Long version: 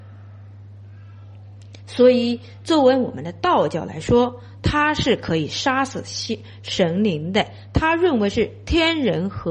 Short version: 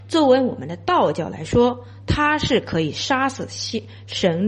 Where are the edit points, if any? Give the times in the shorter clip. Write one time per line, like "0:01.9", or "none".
none